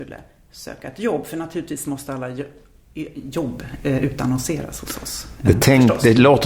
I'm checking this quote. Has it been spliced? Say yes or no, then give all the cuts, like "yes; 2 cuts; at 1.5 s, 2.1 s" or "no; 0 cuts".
no; 0 cuts